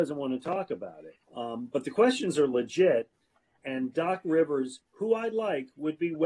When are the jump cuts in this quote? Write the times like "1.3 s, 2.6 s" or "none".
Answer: 1.2 s